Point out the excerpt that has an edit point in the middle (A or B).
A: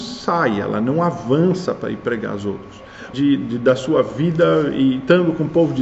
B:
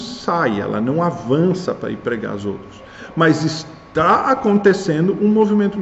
A